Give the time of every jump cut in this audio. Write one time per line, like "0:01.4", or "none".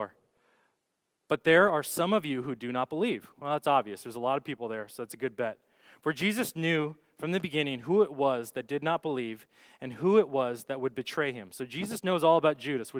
none